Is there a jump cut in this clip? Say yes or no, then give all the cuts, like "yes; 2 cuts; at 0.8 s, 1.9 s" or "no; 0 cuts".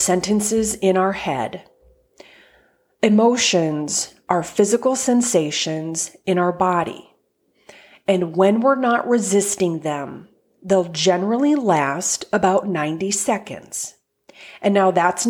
no; 0 cuts